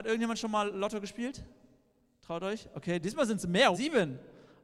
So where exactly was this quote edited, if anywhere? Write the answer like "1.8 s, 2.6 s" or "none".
3.7 s